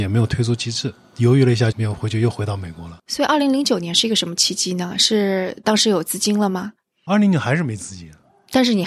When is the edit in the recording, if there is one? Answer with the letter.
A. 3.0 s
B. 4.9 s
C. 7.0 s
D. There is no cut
A